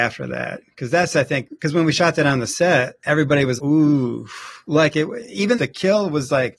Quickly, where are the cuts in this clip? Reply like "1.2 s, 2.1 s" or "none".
3.6 s, 5.5 s